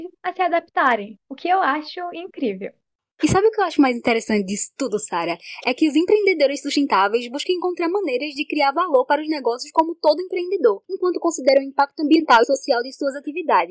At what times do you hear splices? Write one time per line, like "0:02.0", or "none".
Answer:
none